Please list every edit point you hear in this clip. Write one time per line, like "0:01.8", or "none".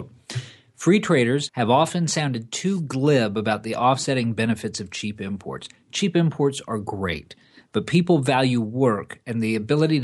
0:01.5

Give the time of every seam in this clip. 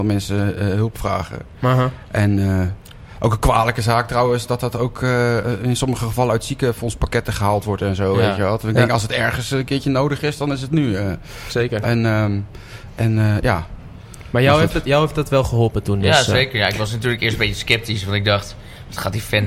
none

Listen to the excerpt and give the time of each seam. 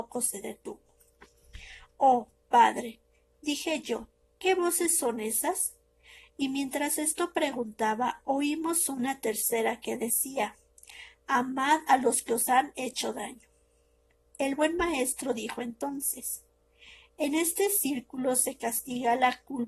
none

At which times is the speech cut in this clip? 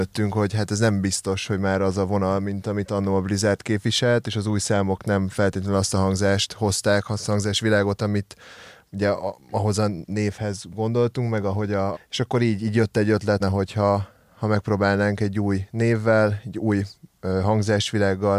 0:11.9
0:13.4

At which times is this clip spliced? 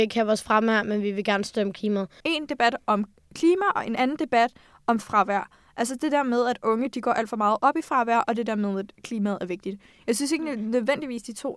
0:02.2

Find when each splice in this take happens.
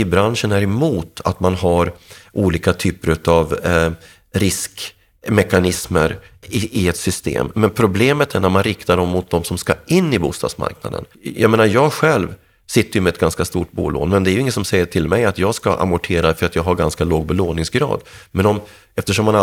0:06.4
0:11.1

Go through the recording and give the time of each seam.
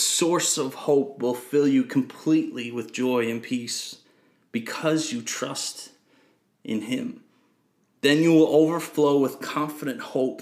none

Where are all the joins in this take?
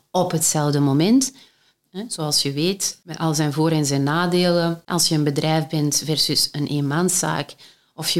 0:01.8
0:04.9

